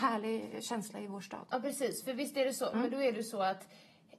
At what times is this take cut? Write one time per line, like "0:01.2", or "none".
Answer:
0:02.7

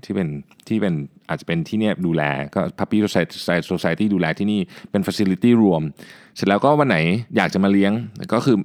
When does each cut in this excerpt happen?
0:07.3

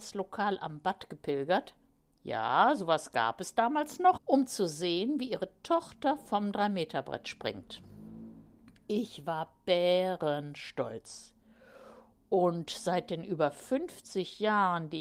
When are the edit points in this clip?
0:04.2

